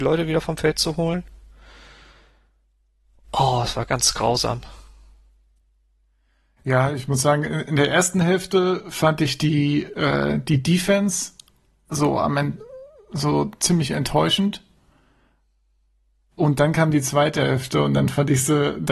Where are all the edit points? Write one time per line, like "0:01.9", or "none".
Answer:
none